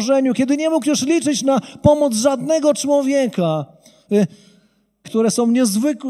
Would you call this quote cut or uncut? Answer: cut